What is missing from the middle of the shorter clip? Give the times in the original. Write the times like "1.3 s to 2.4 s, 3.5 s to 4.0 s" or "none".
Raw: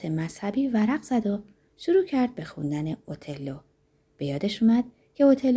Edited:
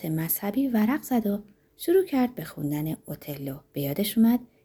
3.7 s to 4.1 s